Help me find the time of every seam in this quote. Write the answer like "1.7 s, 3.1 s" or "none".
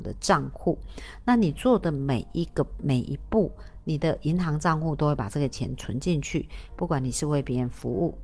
none